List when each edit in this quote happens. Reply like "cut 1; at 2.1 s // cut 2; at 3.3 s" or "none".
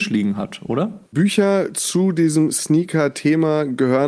cut 1; at 1.1 s